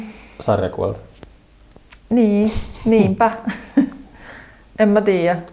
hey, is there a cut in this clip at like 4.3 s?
no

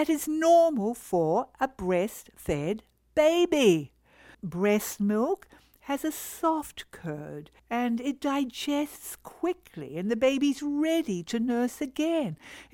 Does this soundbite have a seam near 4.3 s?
yes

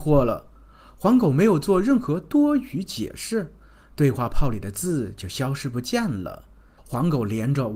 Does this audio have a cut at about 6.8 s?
yes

